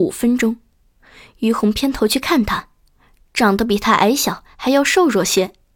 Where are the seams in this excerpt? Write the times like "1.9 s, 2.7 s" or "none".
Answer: none